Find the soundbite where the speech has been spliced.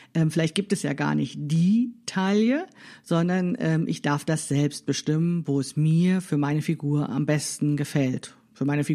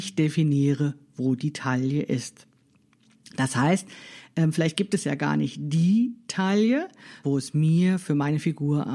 second; 1 cut; at 7.2 s

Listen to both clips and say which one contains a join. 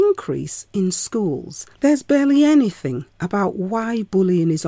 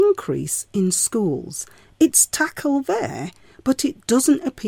first; 1 cut; at 1.7 s

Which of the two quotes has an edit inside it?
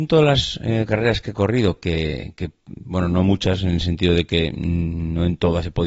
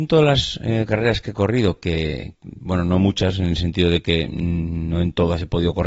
second; 1 cut; at 2.3 s

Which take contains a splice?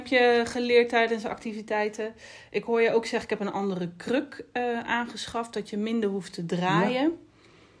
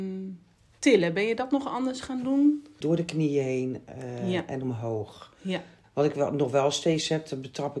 second; 2 cuts; at 2.8 s, 5.8 s

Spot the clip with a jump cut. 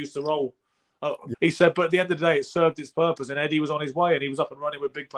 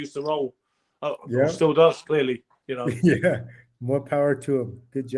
first; 1 cut; at 1.3 s

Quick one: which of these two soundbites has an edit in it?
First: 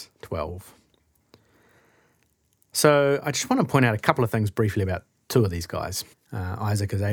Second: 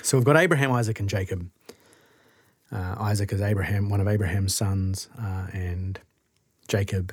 first; 1 cut; at 6.1 s

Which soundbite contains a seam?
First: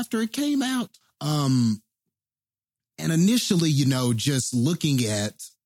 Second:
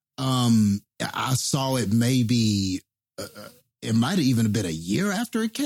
first; 1 cut; at 1.0 s

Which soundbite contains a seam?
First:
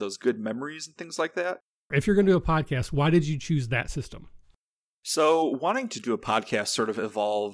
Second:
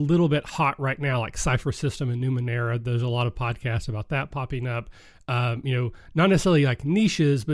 first; 1 cut; at 1.9 s

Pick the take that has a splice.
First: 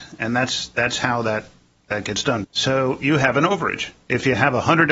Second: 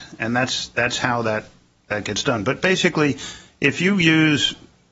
first; 1 cut; at 2.4 s

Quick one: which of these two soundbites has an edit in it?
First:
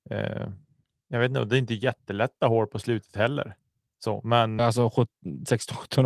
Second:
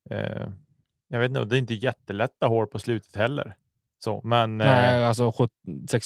first; 1 cut; at 4.6 s

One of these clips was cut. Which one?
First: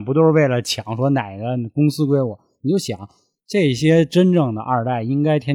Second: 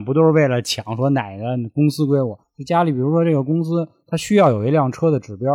second; 1 cut; at 2.4 s

